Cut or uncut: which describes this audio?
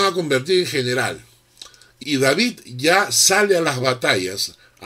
cut